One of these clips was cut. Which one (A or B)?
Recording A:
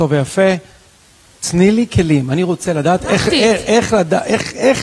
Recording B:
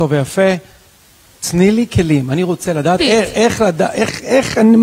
B